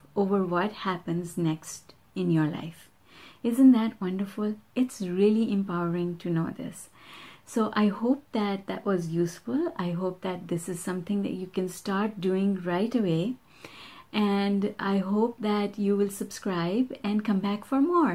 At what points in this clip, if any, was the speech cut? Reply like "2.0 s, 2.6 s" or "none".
none